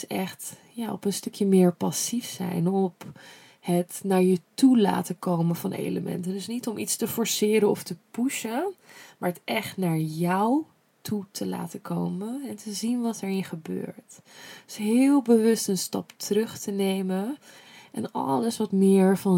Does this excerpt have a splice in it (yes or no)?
no